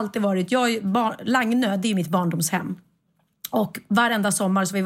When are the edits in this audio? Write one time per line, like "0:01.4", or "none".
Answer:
none